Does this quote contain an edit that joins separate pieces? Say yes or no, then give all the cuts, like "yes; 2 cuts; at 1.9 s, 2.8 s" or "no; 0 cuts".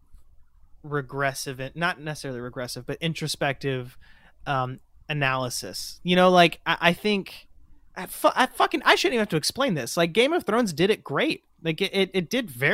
yes; 1 cut; at 7.9 s